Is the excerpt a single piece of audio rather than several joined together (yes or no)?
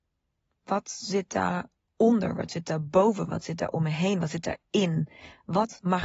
yes